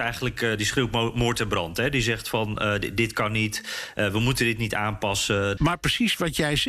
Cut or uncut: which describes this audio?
cut